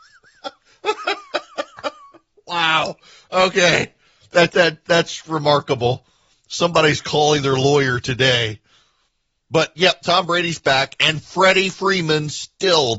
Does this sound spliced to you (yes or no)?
yes